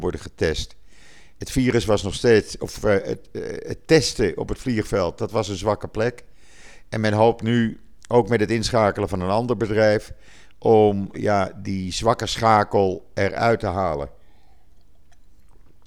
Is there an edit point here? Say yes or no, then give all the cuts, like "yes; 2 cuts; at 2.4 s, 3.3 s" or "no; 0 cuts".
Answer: yes; 1 cut; at 11.1 s